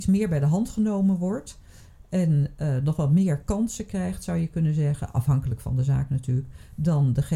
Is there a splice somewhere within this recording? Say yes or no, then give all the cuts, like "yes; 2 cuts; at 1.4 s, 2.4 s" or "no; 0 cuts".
no; 0 cuts